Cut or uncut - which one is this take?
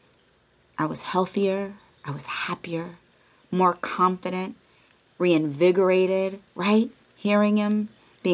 cut